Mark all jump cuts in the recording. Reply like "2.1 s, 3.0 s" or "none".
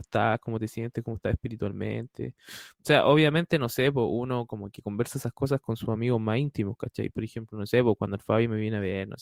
none

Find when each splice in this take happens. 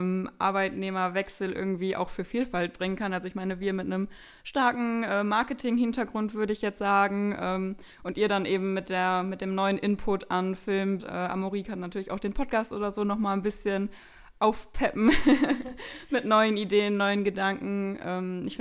11.0 s

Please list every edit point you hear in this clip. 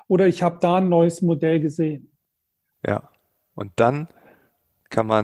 2.7 s

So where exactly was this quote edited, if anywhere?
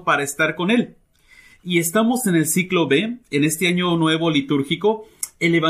none

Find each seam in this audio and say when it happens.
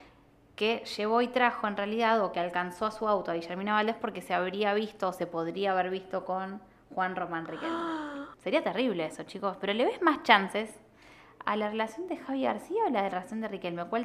8.3 s

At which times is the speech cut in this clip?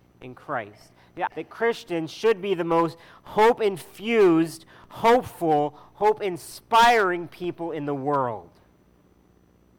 1.3 s

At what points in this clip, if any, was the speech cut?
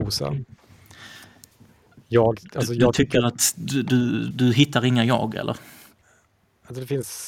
4.3 s

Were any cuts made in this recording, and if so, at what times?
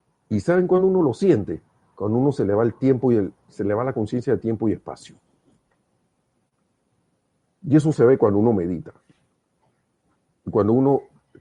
none

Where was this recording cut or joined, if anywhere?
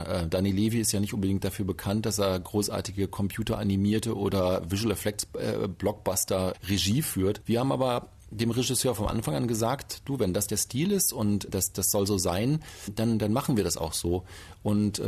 7.4 s

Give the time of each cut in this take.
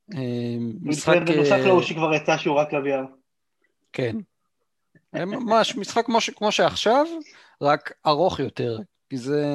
none

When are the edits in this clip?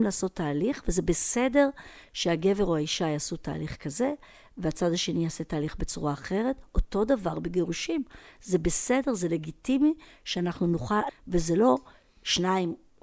11.1 s

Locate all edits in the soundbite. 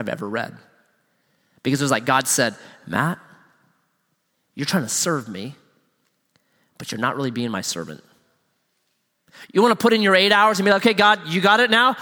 none

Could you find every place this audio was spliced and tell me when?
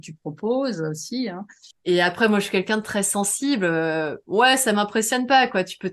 1.7 s

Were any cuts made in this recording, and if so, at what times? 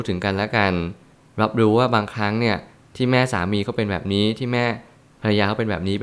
none

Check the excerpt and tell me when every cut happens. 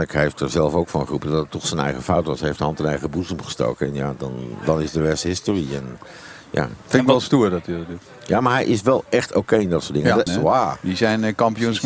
10.3 s

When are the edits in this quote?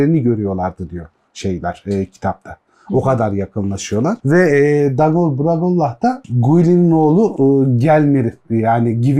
4.2 s

